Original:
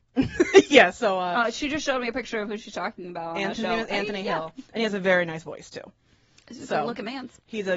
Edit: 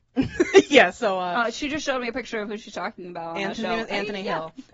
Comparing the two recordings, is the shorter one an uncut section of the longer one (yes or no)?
yes